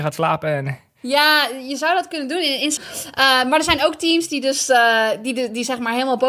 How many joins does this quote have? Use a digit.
1